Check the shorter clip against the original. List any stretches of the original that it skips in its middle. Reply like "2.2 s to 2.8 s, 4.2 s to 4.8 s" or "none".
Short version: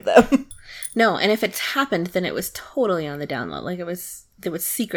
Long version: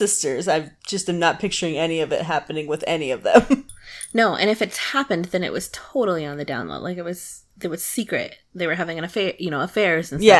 none